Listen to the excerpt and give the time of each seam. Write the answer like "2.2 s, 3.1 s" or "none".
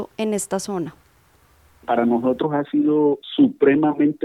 none